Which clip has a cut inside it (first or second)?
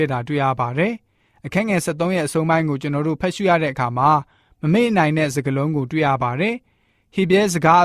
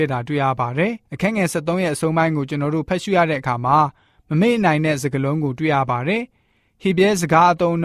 second